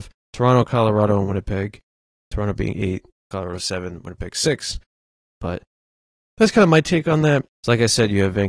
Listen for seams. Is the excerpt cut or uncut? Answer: cut